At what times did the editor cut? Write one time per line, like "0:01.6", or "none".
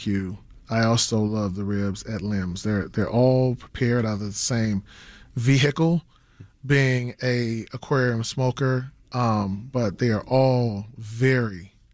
none